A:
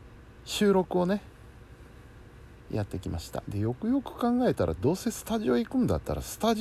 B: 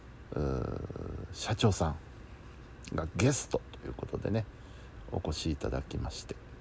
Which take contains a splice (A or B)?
A